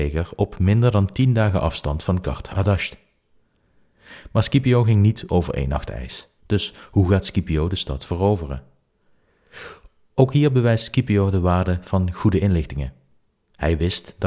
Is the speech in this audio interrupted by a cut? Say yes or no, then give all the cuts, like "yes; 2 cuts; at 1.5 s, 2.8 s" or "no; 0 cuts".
yes; 1 cut; at 6.4 s